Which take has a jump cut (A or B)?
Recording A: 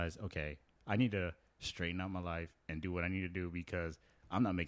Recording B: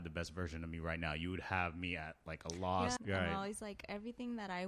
B